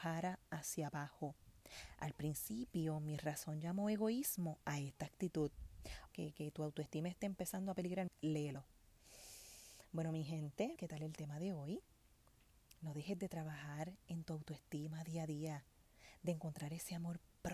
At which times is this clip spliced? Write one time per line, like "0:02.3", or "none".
0:06.1
0:08.1
0:10.8